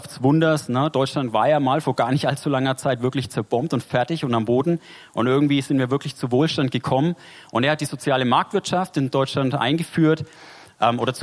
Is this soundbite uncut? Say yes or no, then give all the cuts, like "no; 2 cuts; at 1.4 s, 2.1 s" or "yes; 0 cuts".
yes; 0 cuts